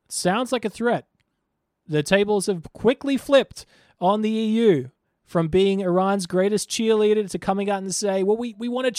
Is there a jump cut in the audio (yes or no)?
no